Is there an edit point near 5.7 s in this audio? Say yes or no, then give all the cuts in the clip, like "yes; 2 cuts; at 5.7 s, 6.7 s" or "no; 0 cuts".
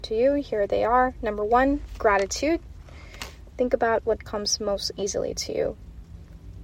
no; 1 cut; at 3.5 s